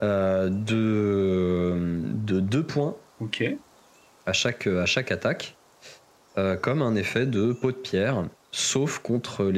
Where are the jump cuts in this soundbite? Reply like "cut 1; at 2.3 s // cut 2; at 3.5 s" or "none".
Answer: none